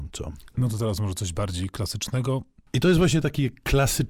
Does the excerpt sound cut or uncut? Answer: cut